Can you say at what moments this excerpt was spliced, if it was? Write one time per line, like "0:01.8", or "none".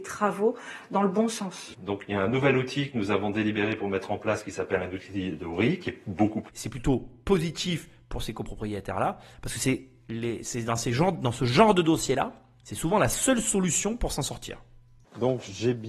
0:01.7
0:06.5